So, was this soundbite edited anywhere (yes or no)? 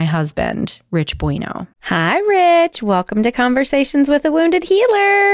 yes